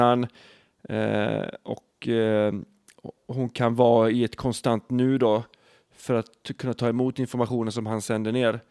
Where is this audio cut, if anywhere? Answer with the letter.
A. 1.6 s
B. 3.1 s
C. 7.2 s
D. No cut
D